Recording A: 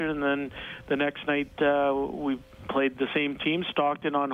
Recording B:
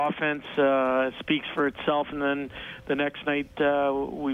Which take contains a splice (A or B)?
B